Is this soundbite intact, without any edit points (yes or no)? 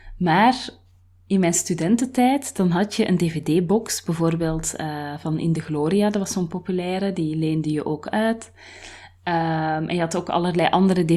yes